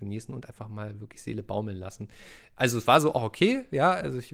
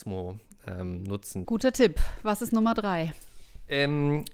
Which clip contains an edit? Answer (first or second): second